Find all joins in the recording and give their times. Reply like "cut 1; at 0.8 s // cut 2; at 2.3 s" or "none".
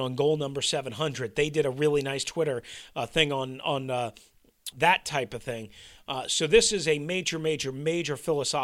cut 1; at 4.7 s

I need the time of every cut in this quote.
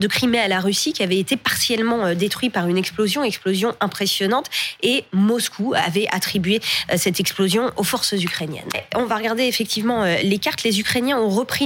cut 1; at 8.7 s

